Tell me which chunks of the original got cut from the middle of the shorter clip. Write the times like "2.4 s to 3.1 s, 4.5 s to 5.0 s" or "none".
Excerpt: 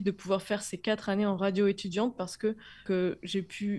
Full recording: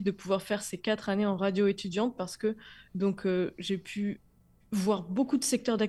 2.9 s to 3.2 s